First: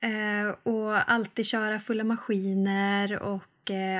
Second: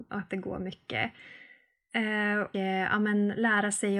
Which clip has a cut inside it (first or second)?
second